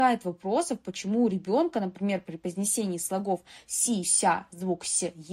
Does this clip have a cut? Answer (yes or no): yes